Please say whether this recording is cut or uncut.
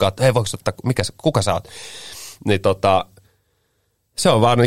uncut